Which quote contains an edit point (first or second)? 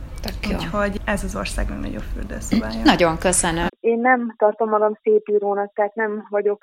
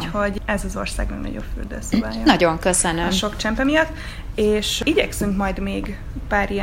first